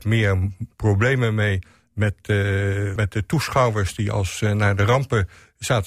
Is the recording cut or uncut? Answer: cut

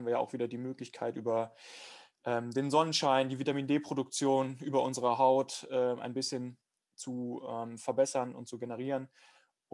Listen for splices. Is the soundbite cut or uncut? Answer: uncut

